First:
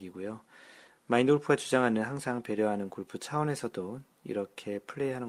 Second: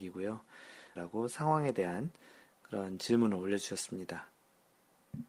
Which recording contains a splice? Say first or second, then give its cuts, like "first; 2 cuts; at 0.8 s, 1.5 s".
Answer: second; 1 cut; at 1.0 s